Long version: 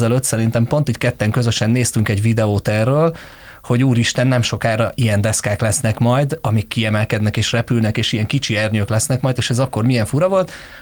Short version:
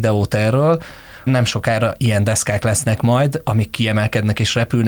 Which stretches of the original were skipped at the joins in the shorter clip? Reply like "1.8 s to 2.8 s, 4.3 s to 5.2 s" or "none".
3.6 s to 4.2 s